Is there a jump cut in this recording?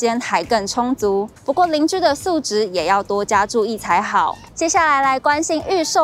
yes; 1 cut; at 1.4 s

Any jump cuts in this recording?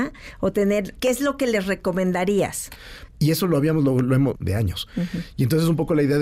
yes; 3 cuts; at 1.0 s, 3.1 s, 4.3 s

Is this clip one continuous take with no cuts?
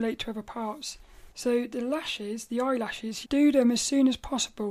no; 2 cuts; at 1.3 s, 3.2 s

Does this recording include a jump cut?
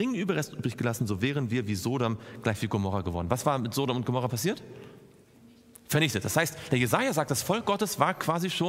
no; 0 cuts

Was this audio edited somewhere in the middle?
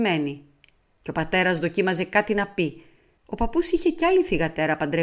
yes; 1 cut; at 3.2 s

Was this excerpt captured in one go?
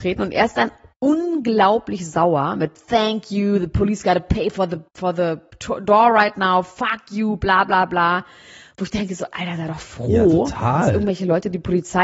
yes; 0 cuts

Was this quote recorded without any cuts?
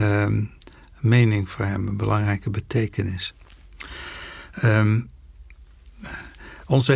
yes; 0 cuts

